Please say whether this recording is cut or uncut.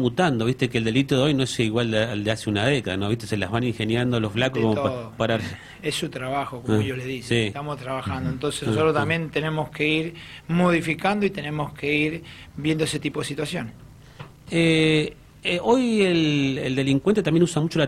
uncut